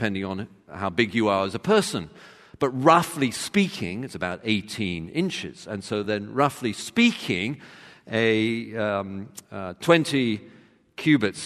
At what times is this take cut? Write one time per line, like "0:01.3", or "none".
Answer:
none